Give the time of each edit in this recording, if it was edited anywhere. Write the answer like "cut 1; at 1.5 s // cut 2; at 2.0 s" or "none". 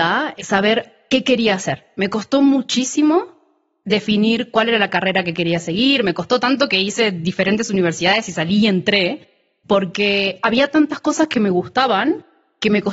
none